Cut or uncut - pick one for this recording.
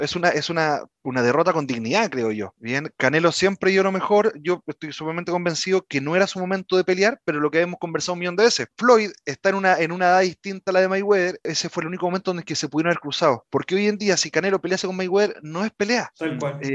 uncut